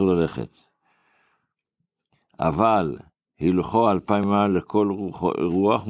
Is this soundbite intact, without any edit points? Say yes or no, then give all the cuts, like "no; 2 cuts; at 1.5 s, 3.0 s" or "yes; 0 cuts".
yes; 0 cuts